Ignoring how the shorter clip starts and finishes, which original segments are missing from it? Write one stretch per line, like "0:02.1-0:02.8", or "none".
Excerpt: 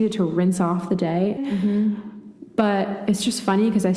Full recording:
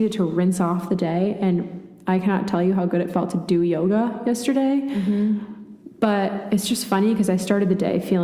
0:01.4-0:04.8